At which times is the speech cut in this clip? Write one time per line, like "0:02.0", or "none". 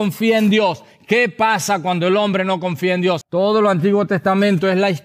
0:03.2